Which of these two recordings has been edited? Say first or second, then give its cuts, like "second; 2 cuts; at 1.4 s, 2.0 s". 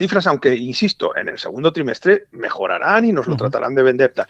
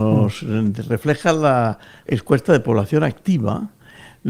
second; 1 cut; at 2.1 s